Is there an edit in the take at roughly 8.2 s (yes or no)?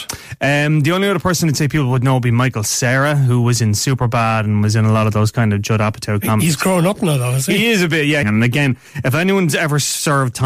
yes